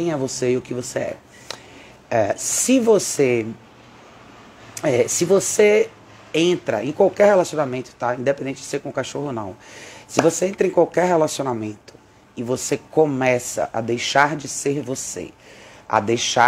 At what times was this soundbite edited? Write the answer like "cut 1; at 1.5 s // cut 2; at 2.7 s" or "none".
none